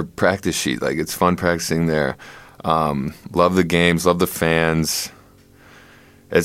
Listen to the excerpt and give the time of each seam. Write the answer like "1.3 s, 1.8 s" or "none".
none